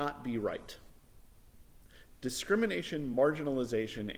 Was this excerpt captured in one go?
yes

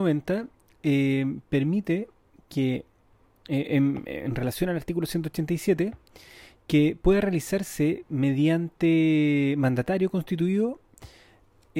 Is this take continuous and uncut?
yes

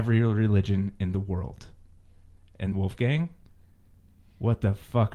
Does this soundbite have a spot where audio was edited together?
yes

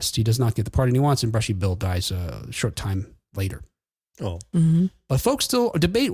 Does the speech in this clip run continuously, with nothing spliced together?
yes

